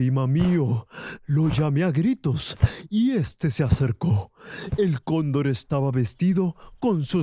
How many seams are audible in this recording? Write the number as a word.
zero